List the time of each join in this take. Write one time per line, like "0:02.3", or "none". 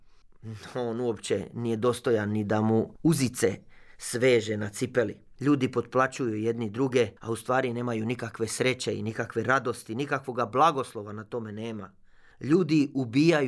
0:05.4
0:07.2